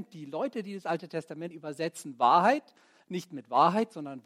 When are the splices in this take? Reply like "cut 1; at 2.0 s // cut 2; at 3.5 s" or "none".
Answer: cut 1; at 1.5 s